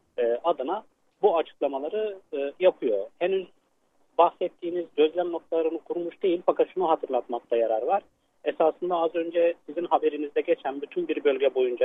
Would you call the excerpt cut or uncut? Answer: uncut